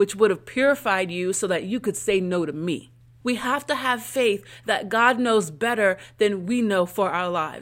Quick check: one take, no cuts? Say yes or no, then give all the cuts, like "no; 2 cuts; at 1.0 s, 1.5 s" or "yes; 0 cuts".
no; 1 cut; at 3.2 s